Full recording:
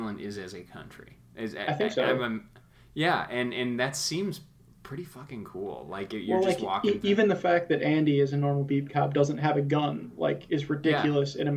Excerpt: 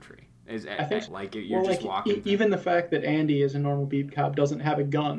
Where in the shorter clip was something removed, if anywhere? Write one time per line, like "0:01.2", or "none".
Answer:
0:01.1